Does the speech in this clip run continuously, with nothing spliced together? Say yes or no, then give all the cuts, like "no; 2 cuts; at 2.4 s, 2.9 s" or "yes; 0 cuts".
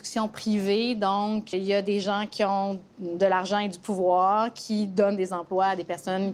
no; 1 cut; at 1.5 s